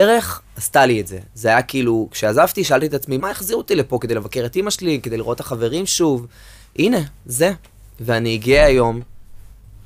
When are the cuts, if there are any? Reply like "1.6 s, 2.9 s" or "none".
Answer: 3.2 s